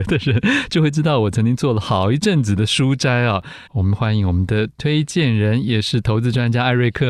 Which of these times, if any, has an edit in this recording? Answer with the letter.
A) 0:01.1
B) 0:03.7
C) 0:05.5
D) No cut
B